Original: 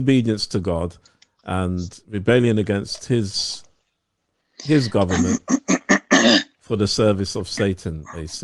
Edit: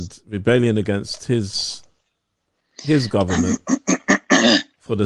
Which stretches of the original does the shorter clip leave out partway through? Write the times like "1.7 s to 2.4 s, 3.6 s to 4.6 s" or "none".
none